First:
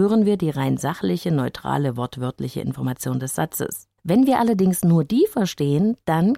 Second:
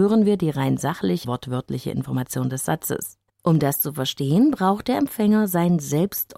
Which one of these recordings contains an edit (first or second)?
second